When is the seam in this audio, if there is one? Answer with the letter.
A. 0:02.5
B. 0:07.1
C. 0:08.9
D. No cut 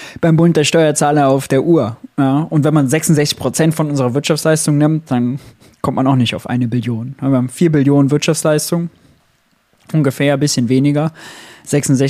D